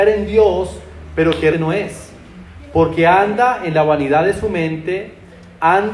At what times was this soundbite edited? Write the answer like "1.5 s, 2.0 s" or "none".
1.5 s